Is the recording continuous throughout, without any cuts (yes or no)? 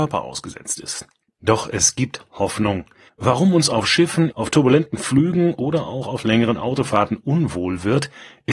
no